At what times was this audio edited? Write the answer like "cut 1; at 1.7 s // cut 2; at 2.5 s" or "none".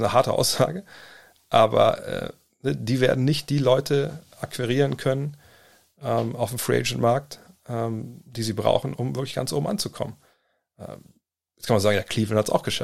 cut 1; at 8.9 s